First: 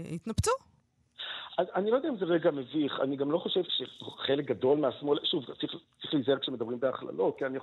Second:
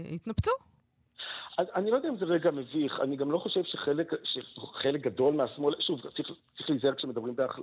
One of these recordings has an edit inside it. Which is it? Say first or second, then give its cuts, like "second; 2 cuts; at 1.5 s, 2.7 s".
first; 1 cut; at 3.6 s